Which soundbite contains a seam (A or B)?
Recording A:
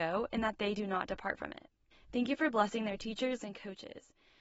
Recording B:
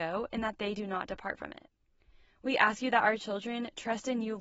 A